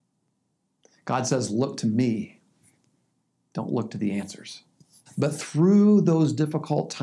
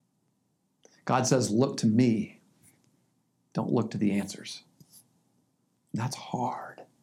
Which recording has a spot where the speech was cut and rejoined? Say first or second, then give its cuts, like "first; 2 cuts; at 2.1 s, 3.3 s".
first; 1 cut; at 5.1 s